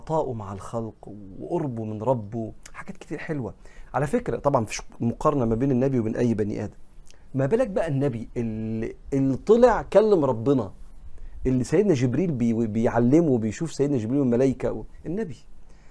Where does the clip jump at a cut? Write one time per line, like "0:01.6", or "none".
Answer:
0:03.9
0:07.3